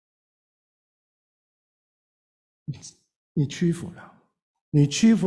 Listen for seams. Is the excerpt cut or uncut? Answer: uncut